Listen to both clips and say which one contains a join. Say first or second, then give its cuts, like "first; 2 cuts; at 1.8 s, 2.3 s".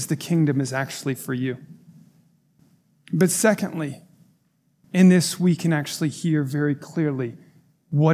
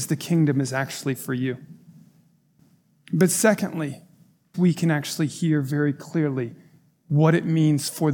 second; 1 cut; at 4.5 s